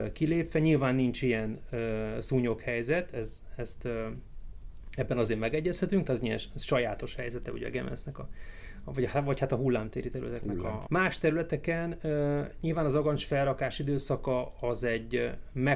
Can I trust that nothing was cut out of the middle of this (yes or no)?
no